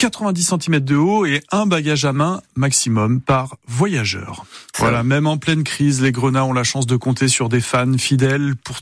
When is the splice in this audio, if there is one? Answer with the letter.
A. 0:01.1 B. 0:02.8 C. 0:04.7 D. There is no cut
C